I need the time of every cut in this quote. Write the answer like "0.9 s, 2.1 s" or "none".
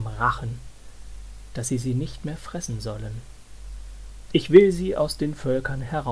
4.3 s